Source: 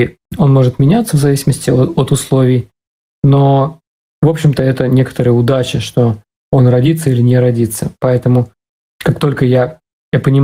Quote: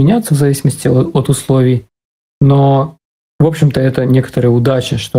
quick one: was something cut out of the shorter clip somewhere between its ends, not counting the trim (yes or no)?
no